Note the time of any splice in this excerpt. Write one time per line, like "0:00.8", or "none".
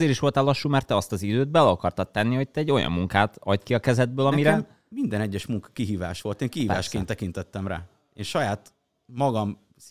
none